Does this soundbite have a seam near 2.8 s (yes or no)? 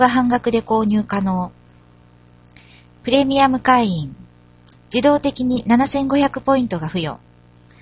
no